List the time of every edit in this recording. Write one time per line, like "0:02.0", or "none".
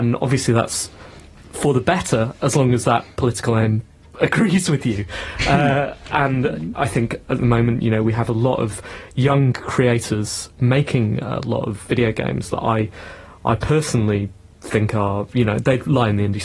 none